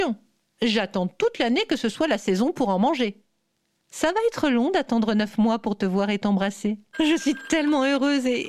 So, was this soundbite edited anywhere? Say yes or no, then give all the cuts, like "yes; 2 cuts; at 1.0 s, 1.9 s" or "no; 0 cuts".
yes; 2 cuts; at 3.8 s, 6.9 s